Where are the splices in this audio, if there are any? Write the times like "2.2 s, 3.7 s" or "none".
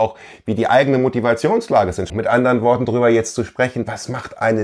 2.1 s